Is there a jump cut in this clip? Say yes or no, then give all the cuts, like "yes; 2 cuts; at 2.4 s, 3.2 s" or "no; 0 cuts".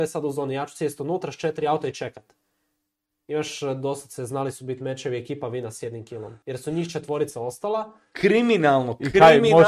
yes; 1 cut; at 6.4 s